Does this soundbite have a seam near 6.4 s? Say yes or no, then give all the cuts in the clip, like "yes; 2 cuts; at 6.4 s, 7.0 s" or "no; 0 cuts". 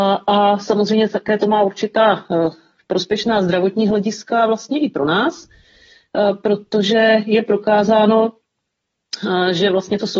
no; 0 cuts